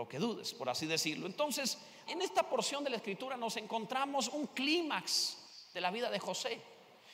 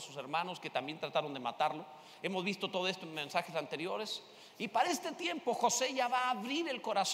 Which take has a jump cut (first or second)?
first